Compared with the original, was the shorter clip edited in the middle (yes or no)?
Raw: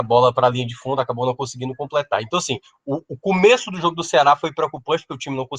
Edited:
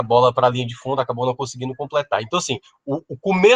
no